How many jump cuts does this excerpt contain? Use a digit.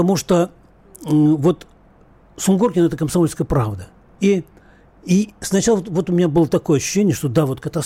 1